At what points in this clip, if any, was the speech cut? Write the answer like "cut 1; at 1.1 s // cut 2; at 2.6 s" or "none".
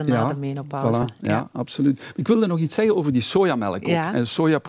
none